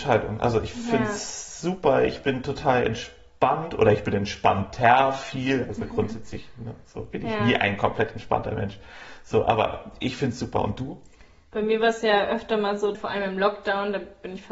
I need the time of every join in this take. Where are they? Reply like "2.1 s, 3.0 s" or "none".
12.9 s